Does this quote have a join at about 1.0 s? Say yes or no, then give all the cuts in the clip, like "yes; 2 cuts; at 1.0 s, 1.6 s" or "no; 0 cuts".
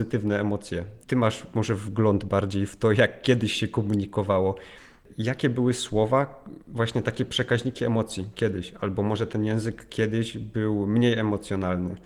yes; 1 cut; at 1.0 s